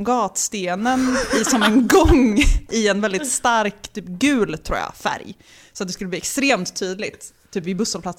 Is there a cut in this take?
no; 0 cuts

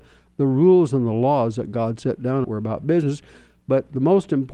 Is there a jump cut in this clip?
yes; 1 cut; at 2.4 s

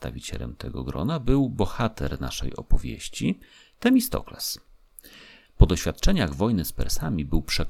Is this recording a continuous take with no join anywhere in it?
no; 1 cut; at 5.4 s

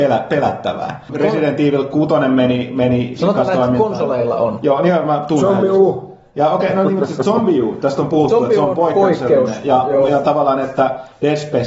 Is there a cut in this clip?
yes; 1 cut; at 1.1 s

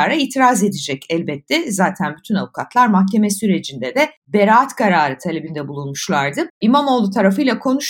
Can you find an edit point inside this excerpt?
yes; 1 cut; at 6.5 s

